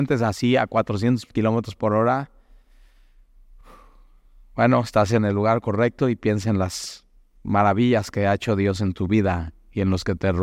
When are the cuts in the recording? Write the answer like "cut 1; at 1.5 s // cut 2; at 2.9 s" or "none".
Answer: none